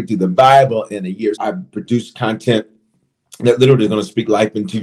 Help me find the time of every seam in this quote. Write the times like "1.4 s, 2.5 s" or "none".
1.4 s